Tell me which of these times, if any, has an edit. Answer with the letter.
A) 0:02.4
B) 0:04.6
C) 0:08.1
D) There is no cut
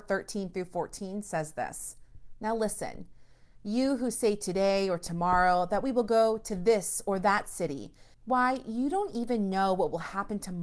C